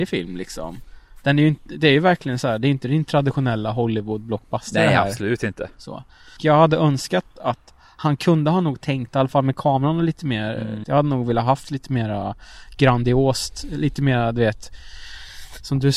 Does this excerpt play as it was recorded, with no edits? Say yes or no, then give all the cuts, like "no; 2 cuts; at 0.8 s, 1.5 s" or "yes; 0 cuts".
no; 2 cuts; at 6.4 s, 10.8 s